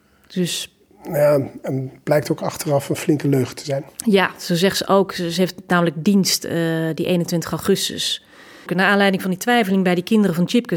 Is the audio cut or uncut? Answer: cut